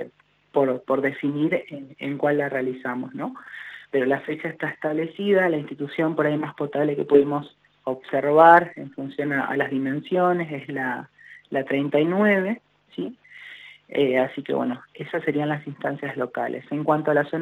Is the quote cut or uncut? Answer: uncut